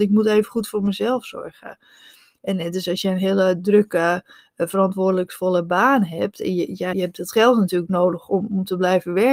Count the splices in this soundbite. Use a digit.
1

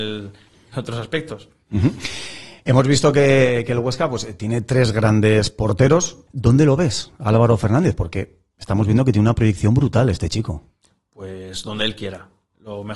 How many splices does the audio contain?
1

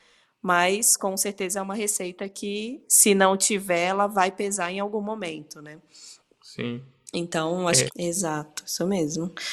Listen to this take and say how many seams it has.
1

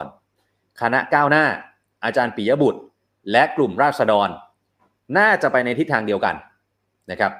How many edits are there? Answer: 0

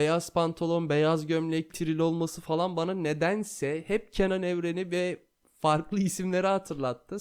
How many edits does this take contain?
1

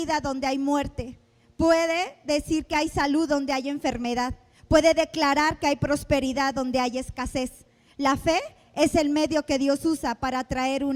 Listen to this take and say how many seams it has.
0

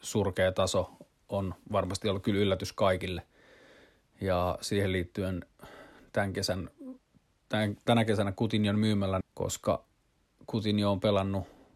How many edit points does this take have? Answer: 1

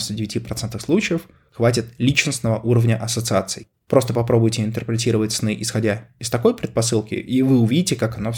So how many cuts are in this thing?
0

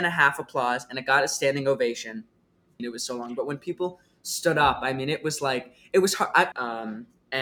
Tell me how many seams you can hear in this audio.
2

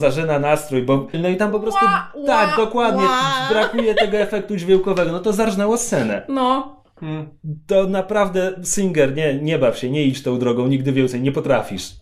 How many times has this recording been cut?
1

